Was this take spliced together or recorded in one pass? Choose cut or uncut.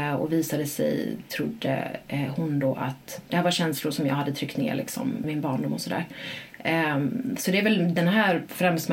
cut